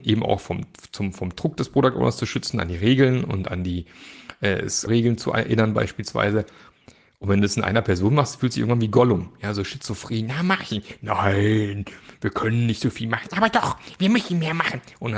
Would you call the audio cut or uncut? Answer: cut